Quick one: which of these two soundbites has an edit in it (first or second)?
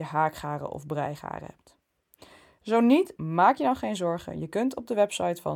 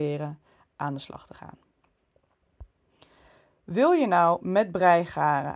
first